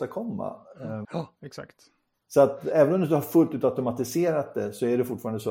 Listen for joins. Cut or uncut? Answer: cut